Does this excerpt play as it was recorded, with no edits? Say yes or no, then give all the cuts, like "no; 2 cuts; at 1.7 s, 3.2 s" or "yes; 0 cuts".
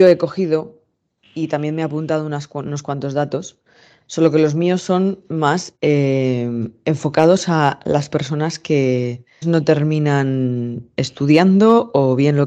no; 1 cut; at 9.4 s